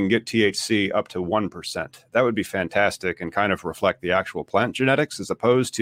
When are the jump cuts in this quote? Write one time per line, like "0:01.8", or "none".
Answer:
none